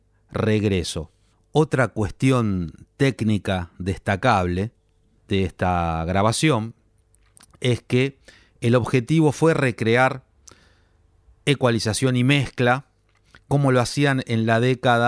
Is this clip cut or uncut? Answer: uncut